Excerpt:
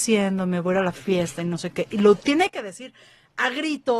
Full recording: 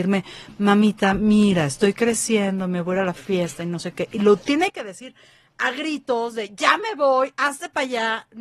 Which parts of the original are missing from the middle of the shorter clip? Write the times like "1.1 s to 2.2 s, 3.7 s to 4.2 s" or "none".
none